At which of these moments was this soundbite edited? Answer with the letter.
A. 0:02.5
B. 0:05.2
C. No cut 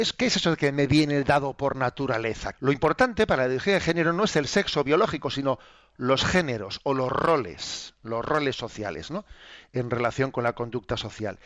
A